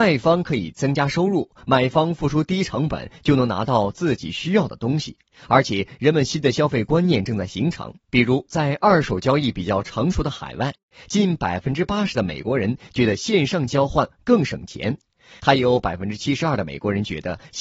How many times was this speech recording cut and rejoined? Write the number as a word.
zero